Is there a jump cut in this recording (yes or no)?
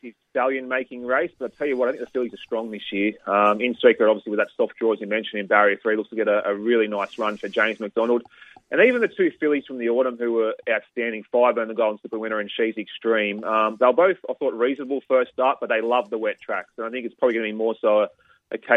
no